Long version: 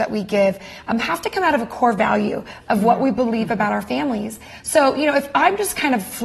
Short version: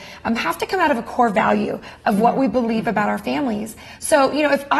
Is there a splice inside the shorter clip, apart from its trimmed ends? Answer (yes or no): no